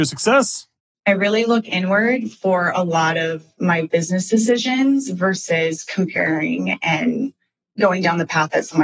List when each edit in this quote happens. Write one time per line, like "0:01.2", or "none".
0:00.9